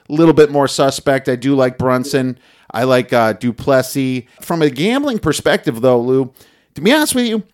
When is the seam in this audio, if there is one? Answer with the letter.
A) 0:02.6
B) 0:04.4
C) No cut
B